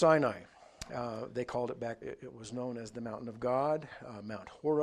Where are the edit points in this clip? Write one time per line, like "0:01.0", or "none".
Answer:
0:02.0